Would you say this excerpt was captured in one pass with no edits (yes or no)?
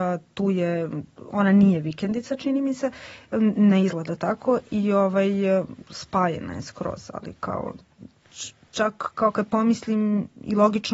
yes